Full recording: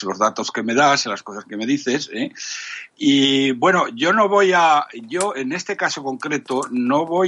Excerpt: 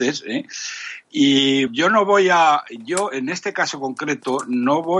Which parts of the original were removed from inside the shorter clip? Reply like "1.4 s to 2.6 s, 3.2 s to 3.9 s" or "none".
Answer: 3.5 s to 3.9 s

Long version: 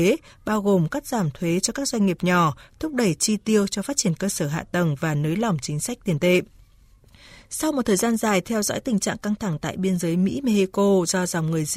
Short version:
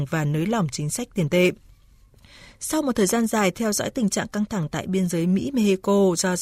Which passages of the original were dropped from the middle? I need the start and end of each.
none

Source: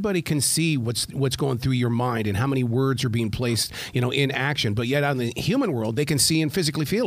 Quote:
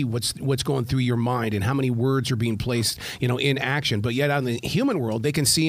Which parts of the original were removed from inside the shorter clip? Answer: none

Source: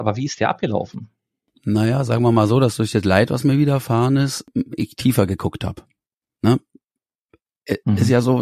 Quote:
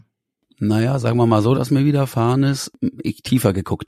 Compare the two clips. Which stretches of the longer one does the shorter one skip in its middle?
2.6 s to 3.3 s

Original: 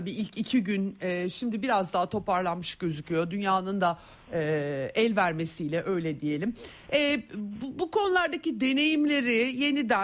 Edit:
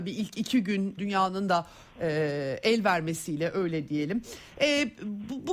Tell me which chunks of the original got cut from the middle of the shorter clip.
1.0 s to 3.3 s

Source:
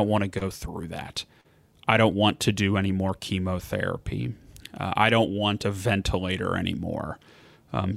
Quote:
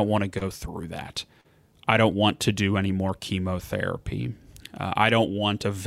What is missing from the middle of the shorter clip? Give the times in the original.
none

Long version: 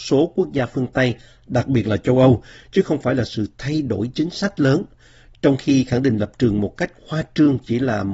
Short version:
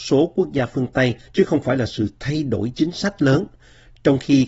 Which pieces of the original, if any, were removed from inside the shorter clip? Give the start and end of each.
1.3 s to 2.6 s

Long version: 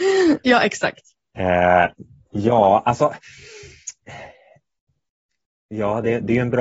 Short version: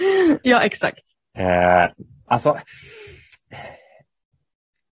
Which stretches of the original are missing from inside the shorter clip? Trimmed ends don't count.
2.3 s to 2.8 s

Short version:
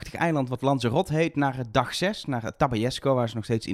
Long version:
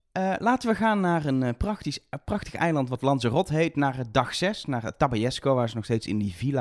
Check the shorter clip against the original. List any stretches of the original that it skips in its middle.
none

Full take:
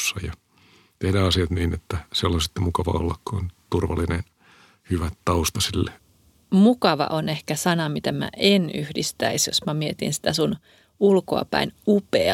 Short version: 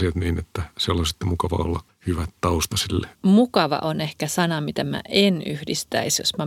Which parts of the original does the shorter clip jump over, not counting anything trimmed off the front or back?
3.2 s to 4.7 s, 6.0 s to 6.4 s

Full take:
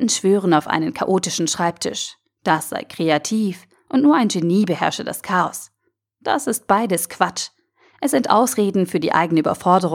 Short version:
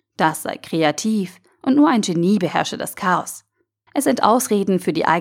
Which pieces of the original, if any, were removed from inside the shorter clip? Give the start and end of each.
6.1 s to 7.9 s

